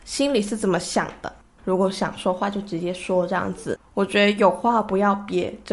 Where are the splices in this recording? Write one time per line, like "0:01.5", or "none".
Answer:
0:01.6
0:03.8